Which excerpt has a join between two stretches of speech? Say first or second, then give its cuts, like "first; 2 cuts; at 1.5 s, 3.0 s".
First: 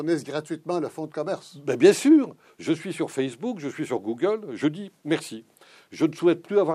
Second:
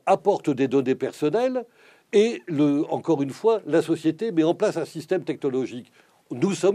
first; 1 cut; at 2.4 s